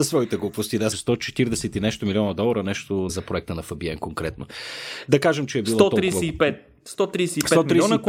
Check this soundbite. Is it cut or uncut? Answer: cut